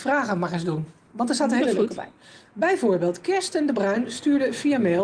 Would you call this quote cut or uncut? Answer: uncut